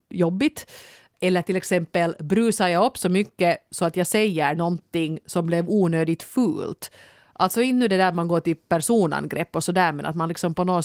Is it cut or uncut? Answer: uncut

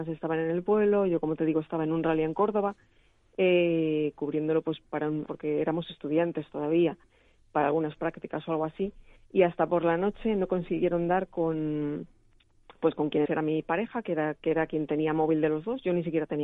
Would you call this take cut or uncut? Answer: cut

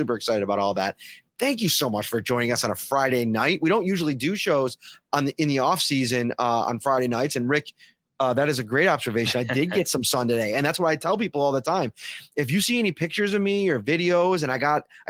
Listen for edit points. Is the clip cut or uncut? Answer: uncut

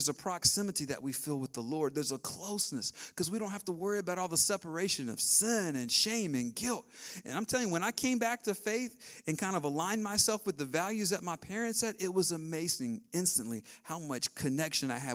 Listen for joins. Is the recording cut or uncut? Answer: uncut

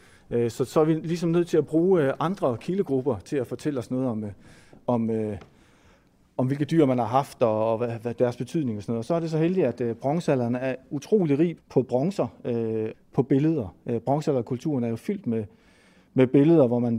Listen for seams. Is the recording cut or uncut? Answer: cut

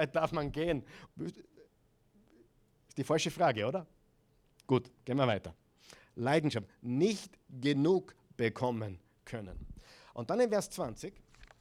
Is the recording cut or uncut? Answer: cut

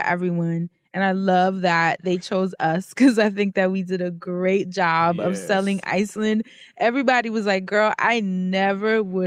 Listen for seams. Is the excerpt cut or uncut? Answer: uncut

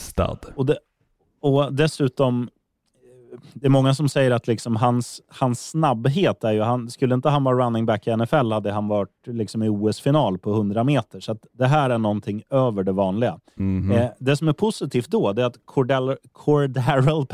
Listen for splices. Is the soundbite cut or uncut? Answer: uncut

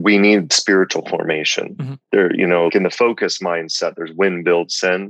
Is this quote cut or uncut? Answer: cut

